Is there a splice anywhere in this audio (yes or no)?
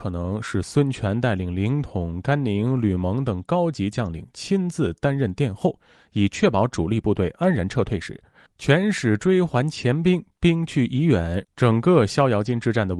yes